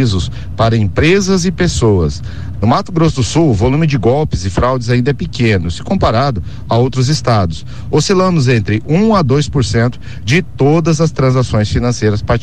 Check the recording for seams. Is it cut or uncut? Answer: cut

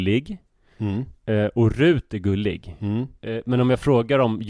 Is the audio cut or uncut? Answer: uncut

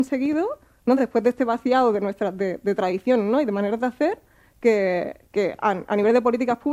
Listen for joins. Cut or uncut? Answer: uncut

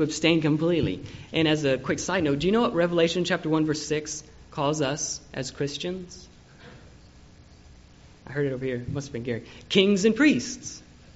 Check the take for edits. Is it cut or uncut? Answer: uncut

